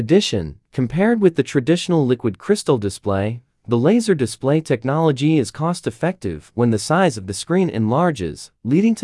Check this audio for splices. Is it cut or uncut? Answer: uncut